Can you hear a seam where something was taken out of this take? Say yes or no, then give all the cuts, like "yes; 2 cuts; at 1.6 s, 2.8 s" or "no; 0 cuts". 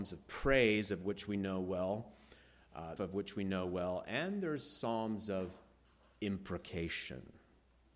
yes; 1 cut; at 3.0 s